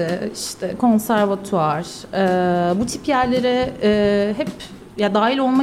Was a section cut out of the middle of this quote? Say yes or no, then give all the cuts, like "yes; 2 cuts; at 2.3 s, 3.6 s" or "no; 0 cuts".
no; 0 cuts